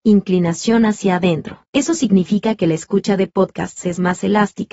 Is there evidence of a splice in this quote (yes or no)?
yes